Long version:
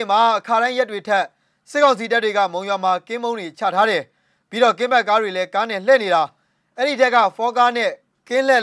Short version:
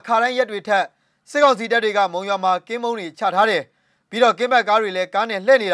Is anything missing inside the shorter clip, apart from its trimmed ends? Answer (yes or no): no